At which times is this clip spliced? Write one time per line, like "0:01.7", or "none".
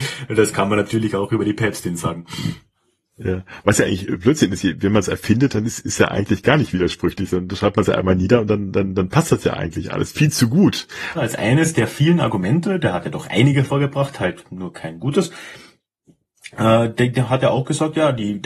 0:11.1